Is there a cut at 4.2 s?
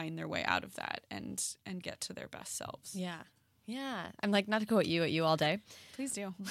yes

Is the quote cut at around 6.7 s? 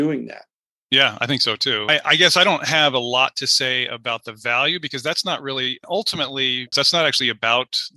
yes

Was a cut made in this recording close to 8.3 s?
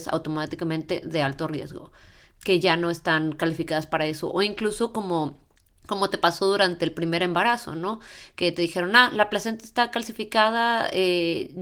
no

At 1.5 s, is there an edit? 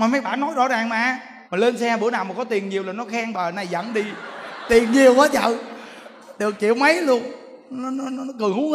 yes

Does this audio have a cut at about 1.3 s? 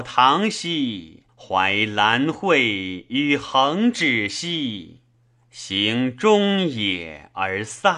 yes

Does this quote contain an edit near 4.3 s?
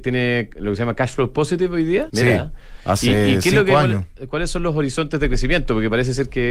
no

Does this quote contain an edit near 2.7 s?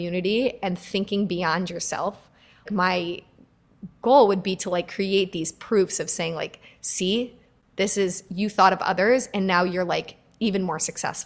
yes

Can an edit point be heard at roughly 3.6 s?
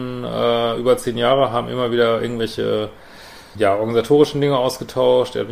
yes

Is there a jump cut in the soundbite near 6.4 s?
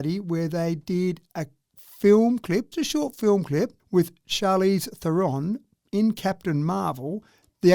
no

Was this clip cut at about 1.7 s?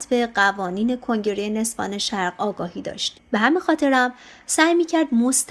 no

